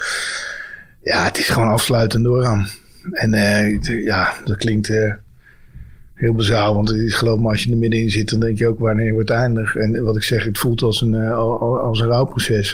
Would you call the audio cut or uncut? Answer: uncut